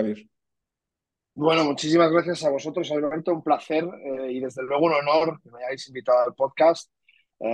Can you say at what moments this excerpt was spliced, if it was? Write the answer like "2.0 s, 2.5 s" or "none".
none